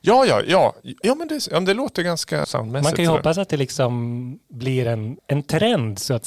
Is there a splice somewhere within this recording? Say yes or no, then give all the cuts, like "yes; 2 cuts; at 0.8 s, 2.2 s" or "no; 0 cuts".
yes; 2 cuts; at 2.4 s, 5.2 s